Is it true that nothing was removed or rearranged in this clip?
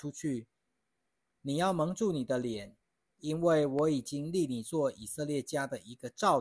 no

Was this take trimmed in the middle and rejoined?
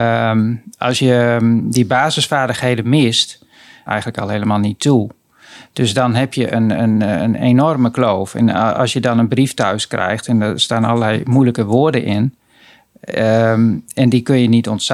yes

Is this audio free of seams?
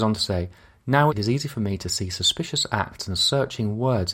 no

